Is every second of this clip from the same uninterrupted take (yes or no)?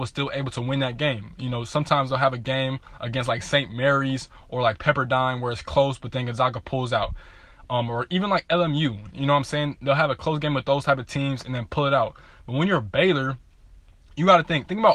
yes